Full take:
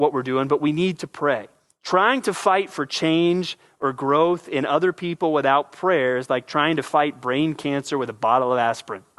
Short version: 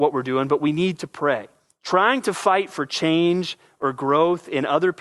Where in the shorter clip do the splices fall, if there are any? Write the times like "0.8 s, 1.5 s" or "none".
none